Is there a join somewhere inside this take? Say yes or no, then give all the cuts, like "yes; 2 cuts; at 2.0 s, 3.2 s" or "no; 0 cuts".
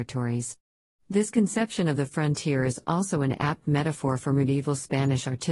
no; 0 cuts